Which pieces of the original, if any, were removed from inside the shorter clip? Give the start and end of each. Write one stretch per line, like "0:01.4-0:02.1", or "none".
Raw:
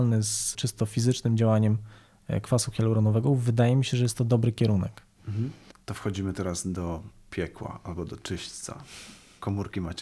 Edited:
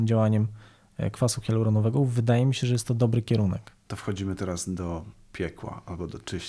0:05.2-0:05.9